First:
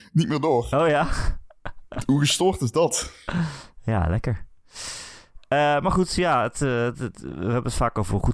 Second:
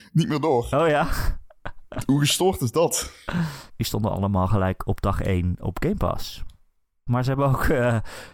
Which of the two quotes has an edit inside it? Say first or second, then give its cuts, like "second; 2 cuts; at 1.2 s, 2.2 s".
second; 2 cuts; at 3.7 s, 7.1 s